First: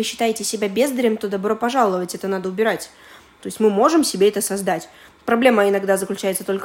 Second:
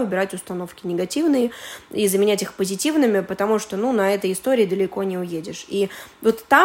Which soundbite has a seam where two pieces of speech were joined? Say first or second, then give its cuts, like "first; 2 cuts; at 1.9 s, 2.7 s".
first; 1 cut; at 3.4 s